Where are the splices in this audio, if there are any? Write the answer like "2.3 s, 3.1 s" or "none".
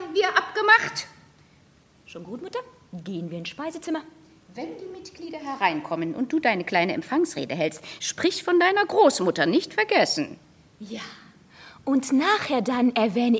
none